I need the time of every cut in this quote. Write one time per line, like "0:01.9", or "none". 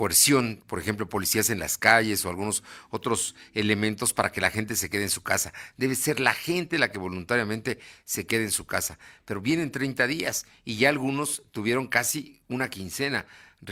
none